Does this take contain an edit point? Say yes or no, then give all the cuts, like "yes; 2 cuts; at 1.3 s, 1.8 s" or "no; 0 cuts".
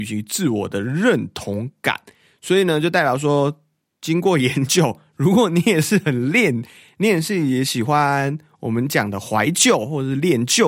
no; 0 cuts